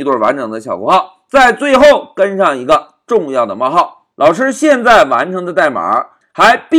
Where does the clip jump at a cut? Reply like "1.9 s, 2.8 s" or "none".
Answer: 4.1 s